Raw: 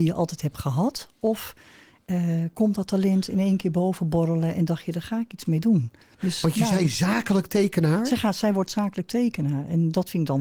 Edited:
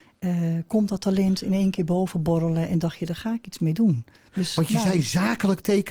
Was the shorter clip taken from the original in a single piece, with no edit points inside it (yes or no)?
yes